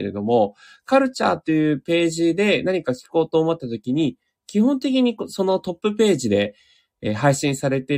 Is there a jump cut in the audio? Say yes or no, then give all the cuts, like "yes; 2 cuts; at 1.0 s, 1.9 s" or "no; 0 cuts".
no; 0 cuts